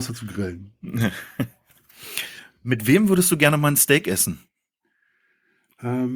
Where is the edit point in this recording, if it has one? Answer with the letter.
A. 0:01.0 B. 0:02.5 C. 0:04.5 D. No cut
D